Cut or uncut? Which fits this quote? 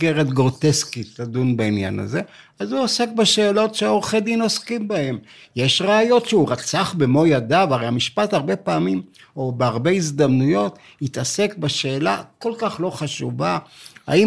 uncut